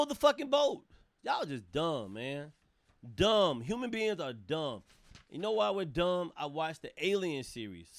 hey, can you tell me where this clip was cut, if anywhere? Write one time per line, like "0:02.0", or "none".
0:01.2